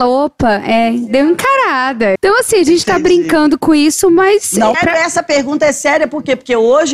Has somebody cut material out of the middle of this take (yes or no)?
yes